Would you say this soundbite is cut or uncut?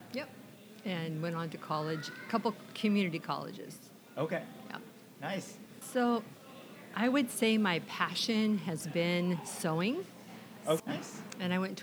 cut